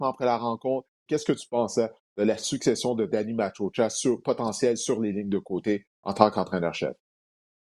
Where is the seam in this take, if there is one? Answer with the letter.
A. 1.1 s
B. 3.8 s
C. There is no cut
A